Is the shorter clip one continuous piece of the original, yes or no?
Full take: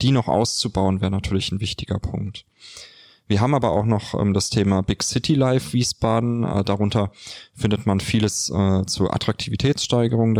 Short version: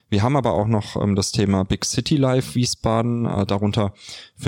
yes